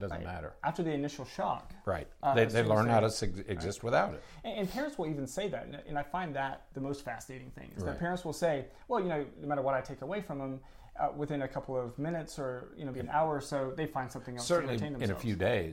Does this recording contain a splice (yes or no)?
yes